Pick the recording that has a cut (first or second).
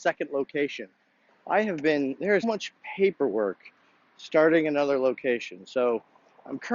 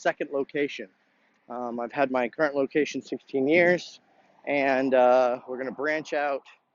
first